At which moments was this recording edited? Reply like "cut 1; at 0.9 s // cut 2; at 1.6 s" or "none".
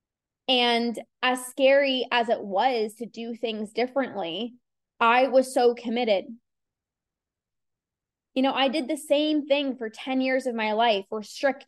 none